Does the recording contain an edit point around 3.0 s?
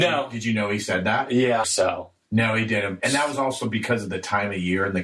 yes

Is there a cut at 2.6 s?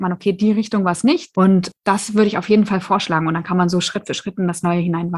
no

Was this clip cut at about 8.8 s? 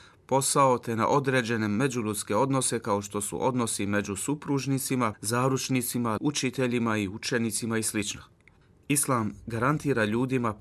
no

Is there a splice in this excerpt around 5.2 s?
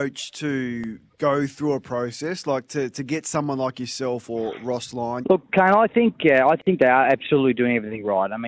yes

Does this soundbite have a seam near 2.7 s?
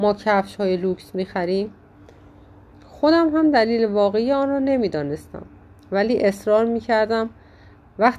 yes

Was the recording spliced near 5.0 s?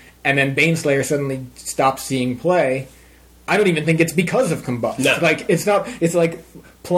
no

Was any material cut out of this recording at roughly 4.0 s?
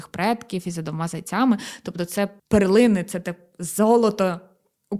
no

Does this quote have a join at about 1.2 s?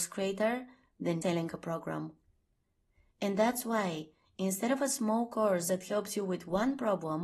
yes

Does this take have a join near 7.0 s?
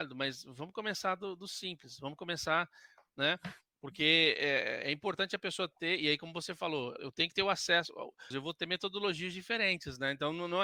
yes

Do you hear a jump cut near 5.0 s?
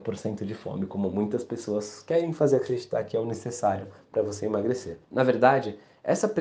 yes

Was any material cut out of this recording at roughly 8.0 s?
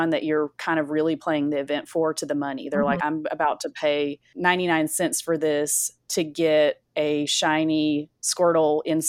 no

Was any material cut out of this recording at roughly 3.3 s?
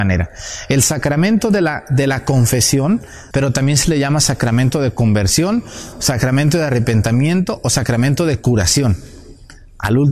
yes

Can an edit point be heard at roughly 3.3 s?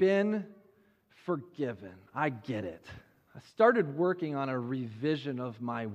yes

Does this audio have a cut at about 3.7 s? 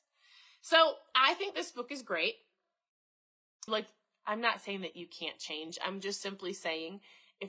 yes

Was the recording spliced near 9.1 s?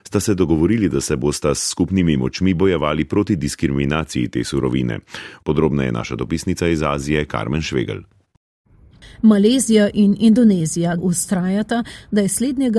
no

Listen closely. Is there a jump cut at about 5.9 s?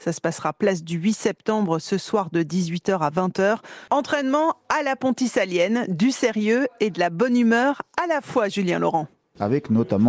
no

